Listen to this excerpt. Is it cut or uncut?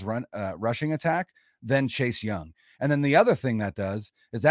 uncut